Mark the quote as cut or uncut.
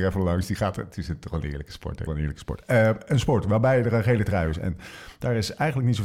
cut